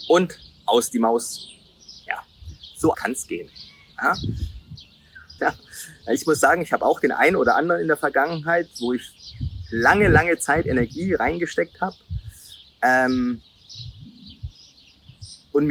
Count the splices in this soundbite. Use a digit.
2